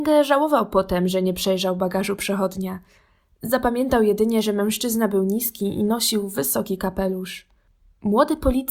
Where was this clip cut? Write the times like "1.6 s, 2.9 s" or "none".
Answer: none